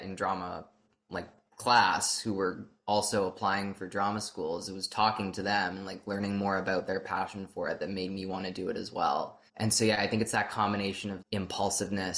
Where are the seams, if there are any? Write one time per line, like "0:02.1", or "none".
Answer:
0:09.5
0:11.2